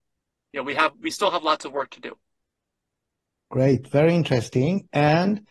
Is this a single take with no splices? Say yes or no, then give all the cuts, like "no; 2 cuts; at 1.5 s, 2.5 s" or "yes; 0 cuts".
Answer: yes; 0 cuts